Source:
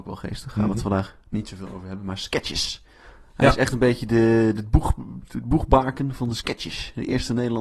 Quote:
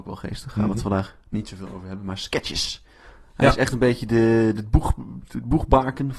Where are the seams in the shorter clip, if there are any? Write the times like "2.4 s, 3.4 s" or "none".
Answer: none